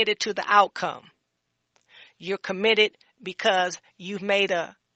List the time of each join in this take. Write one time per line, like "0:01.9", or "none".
none